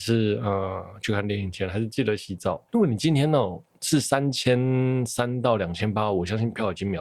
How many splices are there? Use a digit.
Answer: 1